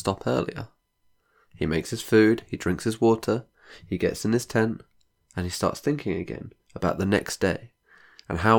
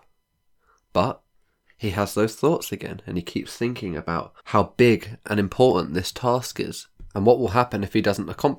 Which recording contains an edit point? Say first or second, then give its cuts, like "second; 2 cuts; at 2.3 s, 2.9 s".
second; 2 cuts; at 1.6 s, 4.4 s